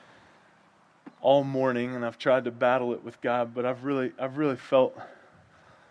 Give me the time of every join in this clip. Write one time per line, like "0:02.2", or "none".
none